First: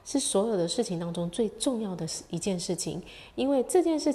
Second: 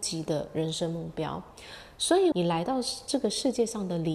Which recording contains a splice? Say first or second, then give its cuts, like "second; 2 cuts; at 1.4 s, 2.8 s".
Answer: second; 1 cut; at 2.3 s